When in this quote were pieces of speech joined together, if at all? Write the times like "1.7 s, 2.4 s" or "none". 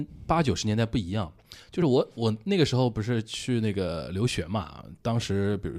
none